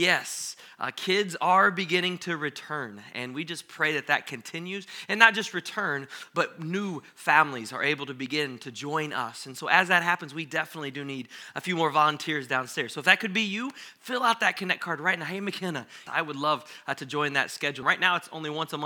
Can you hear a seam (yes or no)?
yes